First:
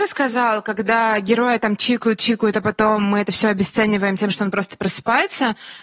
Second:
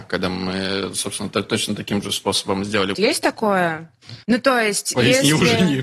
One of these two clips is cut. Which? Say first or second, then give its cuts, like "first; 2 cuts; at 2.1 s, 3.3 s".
second; 2 cuts; at 2.9 s, 4.2 s